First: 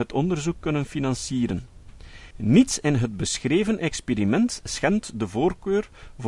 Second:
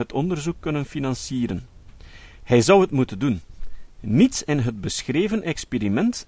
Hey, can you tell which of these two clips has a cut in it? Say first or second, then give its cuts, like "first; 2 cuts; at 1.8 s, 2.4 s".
first; 1 cut; at 2.3 s